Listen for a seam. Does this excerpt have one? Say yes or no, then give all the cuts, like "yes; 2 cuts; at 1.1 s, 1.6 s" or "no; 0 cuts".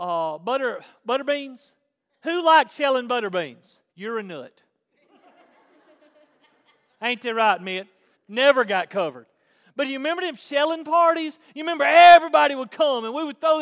yes; 2 cuts; at 3.9 s, 8.1 s